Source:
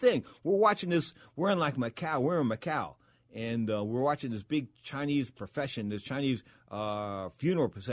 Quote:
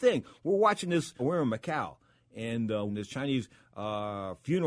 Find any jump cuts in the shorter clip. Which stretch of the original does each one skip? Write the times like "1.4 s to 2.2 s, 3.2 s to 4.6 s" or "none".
1.2 s to 2.2 s, 3.9 s to 5.8 s